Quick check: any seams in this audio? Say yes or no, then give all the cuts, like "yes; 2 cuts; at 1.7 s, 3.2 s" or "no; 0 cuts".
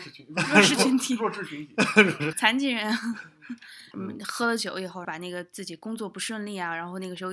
yes; 3 cuts; at 2.3 s, 3.9 s, 5.0 s